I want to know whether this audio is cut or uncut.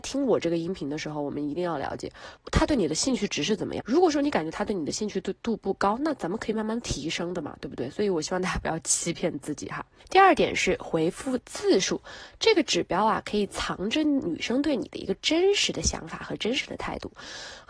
cut